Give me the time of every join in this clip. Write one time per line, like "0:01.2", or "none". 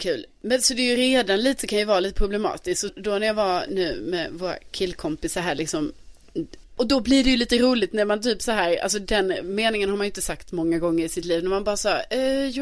0:02.9
0:06.6